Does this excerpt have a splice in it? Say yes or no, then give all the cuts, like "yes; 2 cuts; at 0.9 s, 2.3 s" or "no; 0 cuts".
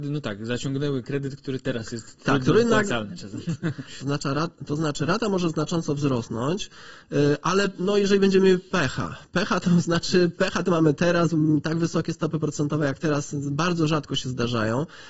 yes; 1 cut; at 4.0 s